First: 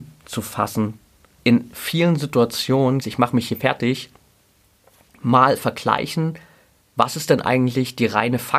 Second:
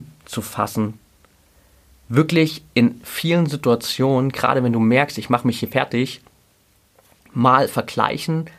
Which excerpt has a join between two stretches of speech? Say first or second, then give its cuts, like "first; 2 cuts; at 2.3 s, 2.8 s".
first; 2 cuts; at 1.4 s, 3.0 s